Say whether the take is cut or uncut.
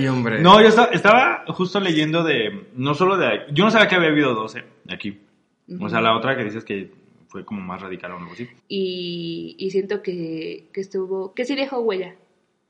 cut